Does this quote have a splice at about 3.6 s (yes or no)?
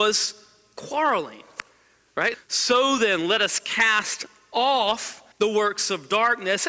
no